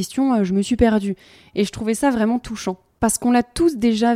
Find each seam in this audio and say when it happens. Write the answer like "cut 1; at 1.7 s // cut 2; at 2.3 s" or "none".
cut 1; at 1.5 s